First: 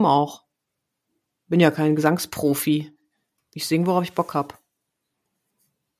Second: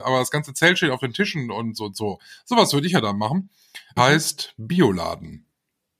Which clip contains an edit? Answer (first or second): second